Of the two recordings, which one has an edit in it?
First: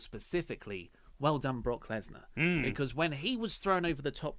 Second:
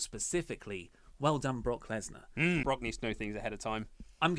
second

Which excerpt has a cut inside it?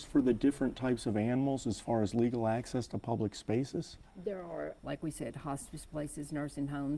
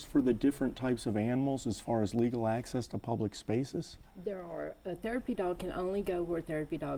first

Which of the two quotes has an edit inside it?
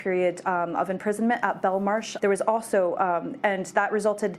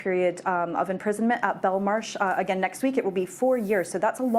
first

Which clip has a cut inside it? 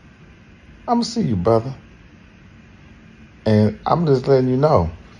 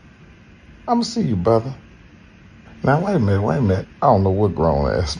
second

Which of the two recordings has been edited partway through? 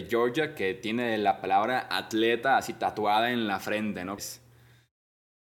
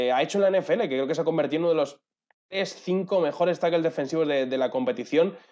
first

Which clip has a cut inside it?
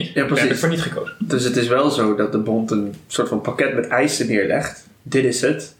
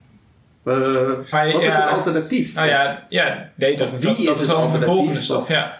second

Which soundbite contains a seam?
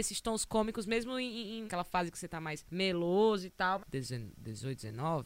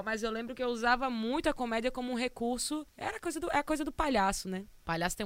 first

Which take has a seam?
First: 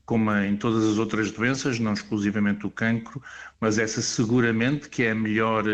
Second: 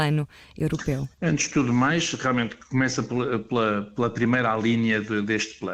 second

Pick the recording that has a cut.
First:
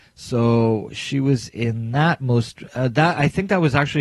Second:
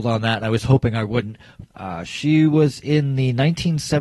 second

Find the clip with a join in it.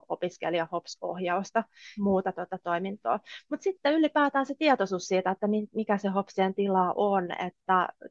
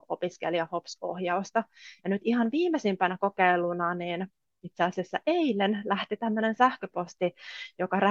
first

